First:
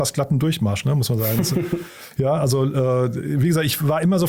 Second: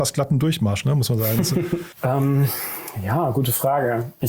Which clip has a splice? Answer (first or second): second